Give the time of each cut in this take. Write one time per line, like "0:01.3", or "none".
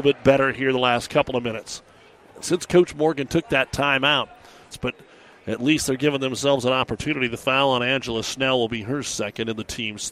0:04.7